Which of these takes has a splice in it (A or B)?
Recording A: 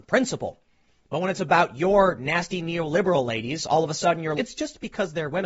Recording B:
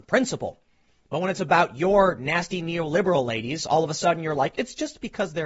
A